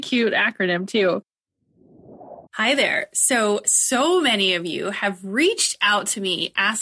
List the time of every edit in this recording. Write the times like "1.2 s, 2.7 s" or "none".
2.5 s